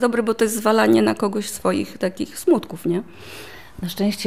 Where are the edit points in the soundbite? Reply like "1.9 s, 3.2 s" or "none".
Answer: none